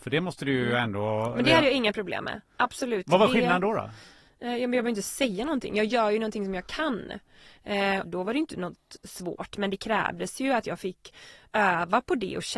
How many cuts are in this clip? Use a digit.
1